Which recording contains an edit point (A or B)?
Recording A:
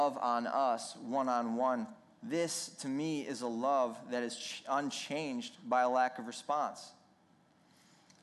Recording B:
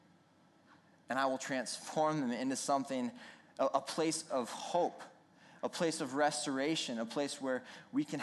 A